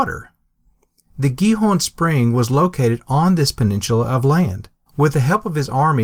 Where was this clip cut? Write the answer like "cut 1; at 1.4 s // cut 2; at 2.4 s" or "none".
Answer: cut 1; at 4.9 s